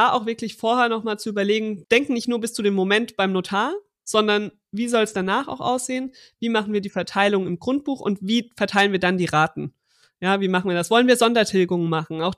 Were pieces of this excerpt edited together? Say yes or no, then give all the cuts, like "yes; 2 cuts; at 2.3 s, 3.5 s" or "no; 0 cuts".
yes; 1 cut; at 1.8 s